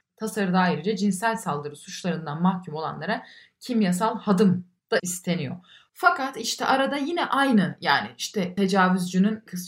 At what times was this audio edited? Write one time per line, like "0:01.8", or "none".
none